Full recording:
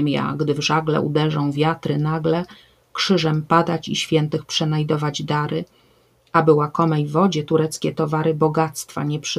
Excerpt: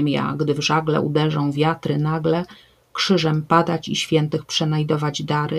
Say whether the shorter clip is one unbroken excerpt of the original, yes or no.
yes